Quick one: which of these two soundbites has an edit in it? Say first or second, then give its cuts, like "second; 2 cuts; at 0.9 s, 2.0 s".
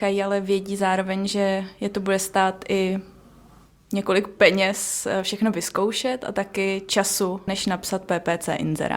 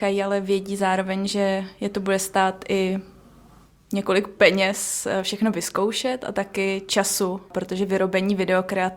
first; 1 cut; at 7.5 s